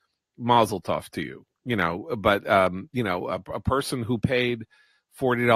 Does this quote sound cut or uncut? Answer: uncut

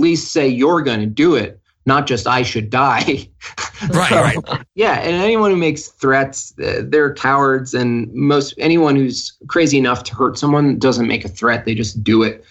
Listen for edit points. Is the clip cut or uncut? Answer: uncut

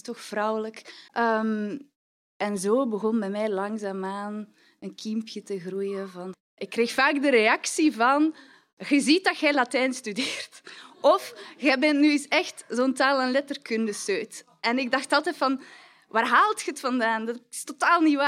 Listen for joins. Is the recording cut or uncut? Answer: cut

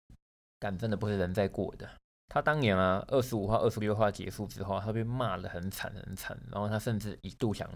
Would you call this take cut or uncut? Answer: cut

